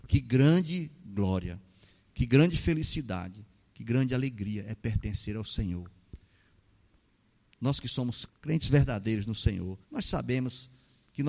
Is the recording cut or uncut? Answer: cut